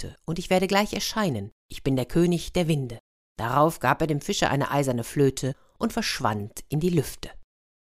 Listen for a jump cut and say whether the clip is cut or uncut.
uncut